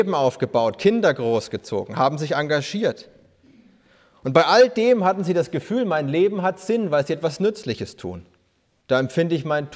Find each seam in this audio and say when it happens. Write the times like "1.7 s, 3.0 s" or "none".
8.8 s